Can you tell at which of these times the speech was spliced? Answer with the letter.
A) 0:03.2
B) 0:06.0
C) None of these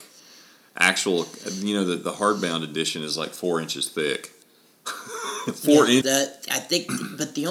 B